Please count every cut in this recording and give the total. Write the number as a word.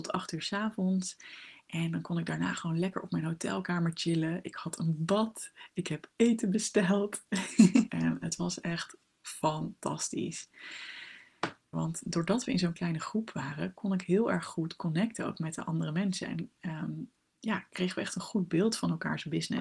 two